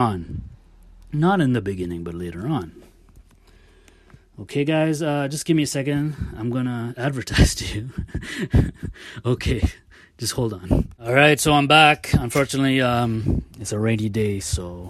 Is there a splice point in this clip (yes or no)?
no